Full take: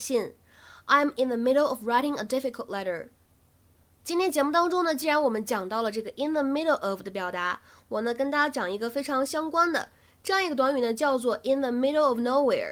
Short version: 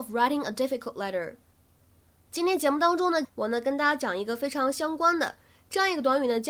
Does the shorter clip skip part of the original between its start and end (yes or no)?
yes